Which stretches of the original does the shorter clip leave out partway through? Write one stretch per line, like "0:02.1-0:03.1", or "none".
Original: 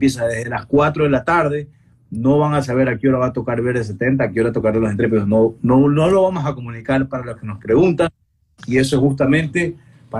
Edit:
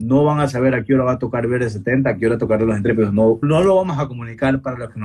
0:05.6-0:05.9